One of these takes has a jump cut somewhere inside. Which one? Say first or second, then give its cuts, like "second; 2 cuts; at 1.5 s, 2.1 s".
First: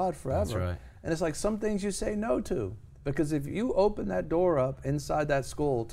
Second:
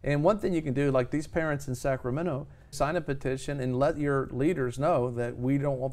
second; 1 cut; at 2.7 s